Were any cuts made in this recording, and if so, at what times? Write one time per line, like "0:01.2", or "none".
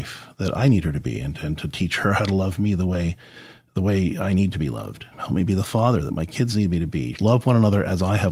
0:05.1
0:07.1